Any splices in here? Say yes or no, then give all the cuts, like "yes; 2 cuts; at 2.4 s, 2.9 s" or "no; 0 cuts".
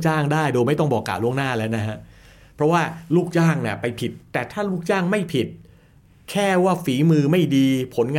yes; 1 cut; at 4.3 s